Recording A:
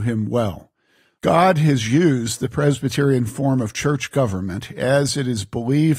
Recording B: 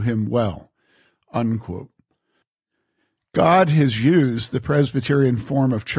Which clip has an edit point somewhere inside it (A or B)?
A